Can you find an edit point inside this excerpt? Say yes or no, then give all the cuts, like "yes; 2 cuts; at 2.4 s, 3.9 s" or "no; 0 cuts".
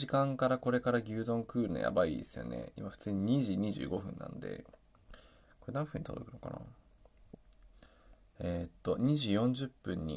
no; 0 cuts